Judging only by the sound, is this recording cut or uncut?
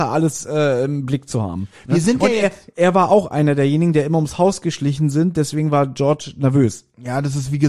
uncut